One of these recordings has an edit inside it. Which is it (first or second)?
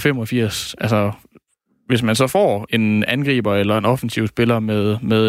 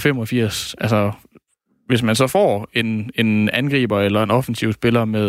first